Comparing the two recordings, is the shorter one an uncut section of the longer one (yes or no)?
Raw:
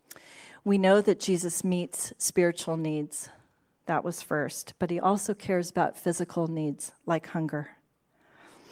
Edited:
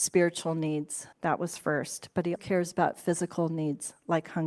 no